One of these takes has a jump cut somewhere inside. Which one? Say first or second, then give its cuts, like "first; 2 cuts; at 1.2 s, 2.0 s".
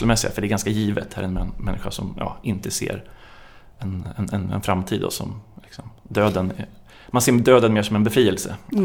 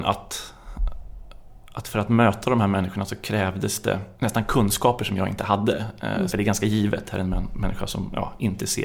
second; 2 cuts; at 4.1 s, 6.3 s